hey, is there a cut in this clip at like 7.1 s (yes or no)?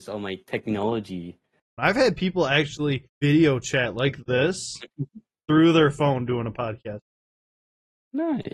no